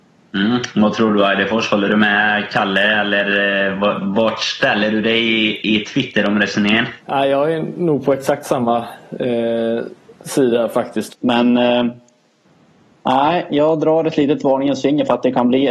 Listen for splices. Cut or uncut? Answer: cut